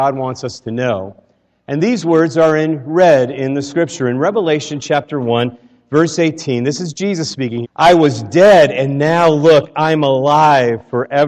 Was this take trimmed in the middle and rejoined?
yes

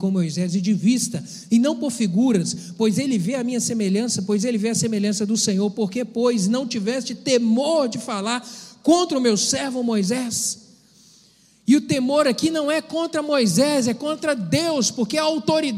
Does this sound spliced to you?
no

